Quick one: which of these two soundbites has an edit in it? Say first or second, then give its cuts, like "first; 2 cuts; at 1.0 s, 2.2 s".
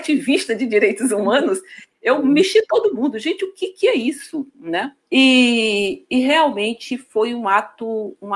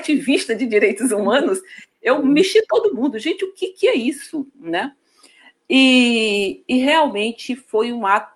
first; 1 cut; at 5.0 s